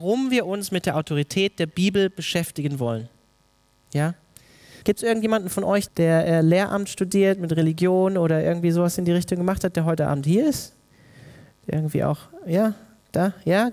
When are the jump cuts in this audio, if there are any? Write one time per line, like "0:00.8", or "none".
0:04.8
0:05.9